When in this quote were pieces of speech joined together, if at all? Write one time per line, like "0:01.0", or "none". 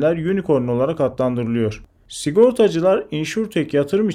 none

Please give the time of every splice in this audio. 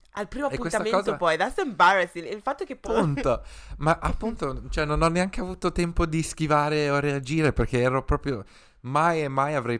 0:02.8

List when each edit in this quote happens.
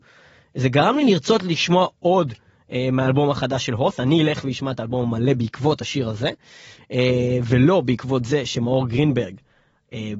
none

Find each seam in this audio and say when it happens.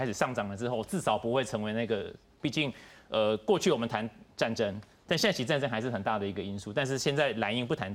0:02.4

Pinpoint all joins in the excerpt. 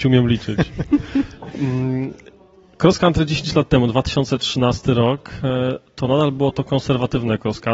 none

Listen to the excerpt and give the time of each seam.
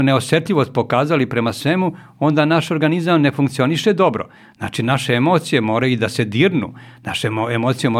none

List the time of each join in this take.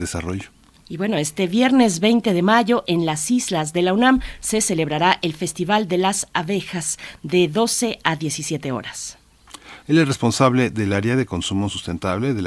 0:09.8

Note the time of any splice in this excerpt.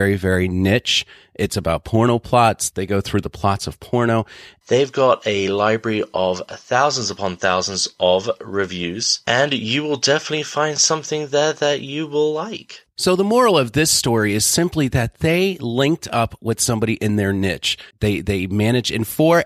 0:04.6
0:17.9

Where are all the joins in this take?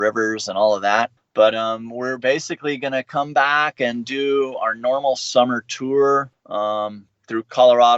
none

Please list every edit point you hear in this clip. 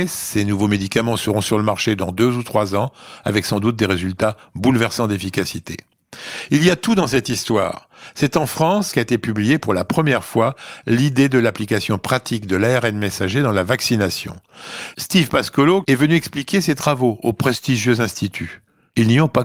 0:08.9
0:15.8

